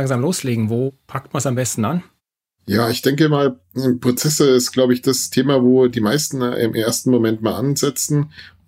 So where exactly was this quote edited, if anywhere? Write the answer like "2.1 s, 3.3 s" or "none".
none